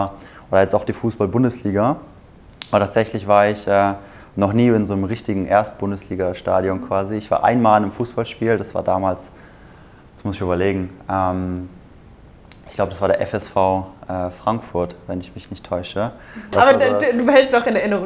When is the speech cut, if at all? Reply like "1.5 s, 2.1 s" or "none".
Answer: 16.5 s